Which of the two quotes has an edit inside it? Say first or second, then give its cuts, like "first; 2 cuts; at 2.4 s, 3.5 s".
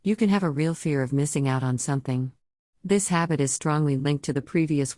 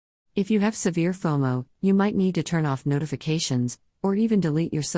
first; 1 cut; at 2.7 s